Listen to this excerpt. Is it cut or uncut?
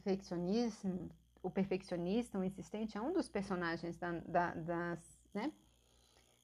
cut